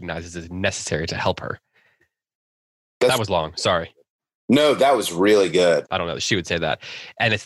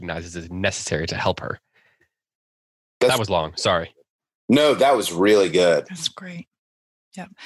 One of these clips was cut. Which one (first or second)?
first